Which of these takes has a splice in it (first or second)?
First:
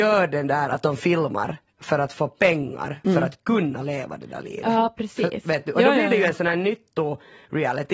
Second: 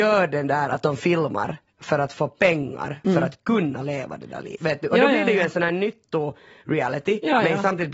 second